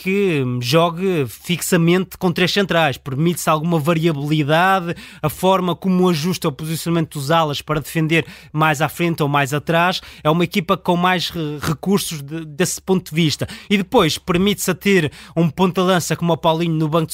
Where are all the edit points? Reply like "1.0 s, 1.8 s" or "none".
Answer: none